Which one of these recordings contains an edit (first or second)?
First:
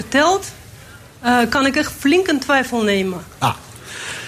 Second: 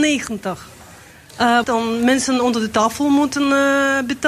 second